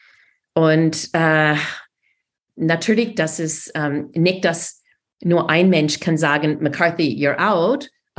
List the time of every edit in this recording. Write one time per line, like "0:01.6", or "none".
none